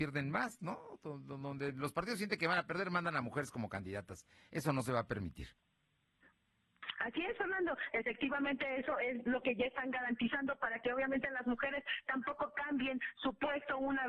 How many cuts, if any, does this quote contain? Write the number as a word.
zero